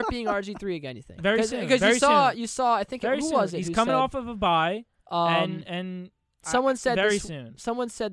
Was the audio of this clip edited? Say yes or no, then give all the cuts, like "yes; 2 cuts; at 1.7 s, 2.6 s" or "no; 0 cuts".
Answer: no; 0 cuts